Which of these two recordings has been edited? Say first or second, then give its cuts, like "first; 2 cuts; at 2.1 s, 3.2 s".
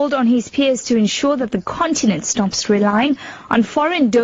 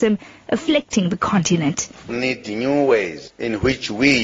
second; 1 cut; at 2.1 s